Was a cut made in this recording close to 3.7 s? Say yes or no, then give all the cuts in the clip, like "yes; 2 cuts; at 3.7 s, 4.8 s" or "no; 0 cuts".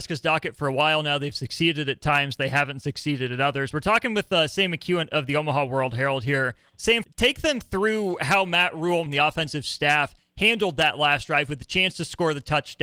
no; 2 cuts; at 7.0 s, 9.1 s